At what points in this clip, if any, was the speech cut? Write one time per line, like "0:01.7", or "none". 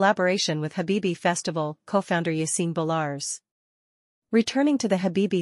none